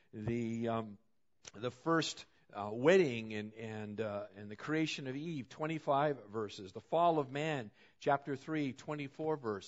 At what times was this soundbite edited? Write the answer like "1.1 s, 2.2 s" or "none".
none